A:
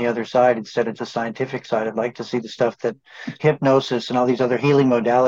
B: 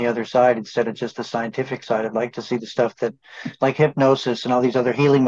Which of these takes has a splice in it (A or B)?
A